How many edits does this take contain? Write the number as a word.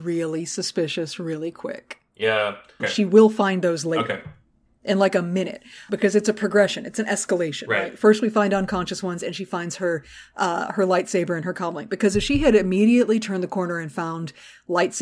two